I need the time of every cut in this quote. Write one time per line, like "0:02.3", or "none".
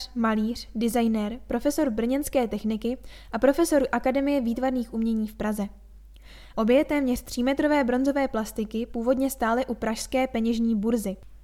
0:06.5